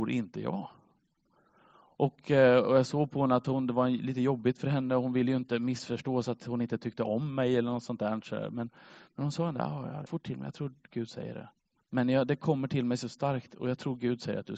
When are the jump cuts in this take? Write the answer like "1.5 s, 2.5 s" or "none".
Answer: 10.1 s, 11.8 s